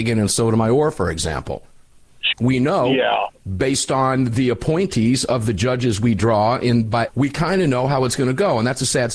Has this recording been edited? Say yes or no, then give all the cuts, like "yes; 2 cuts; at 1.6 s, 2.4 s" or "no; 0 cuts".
yes; 2 cuts; at 2.3 s, 7.1 s